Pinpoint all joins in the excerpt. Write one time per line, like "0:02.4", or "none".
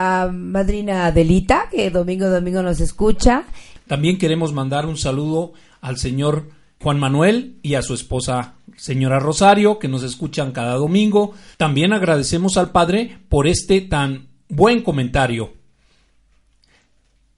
0:06.8
0:11.5